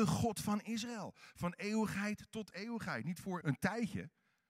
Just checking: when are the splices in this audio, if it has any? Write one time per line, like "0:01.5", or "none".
0:03.4